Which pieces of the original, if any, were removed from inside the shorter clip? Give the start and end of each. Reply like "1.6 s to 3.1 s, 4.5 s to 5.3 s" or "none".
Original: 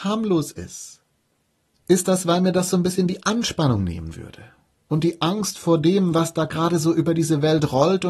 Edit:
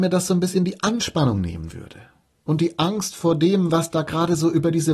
none